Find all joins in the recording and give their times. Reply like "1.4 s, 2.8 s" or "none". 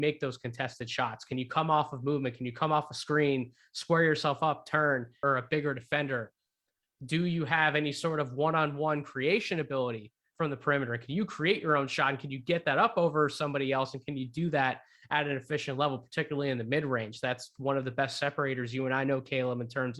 5.2 s